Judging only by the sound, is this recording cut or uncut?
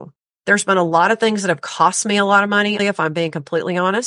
cut